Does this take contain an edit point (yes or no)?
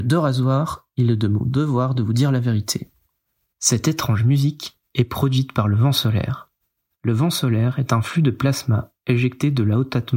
no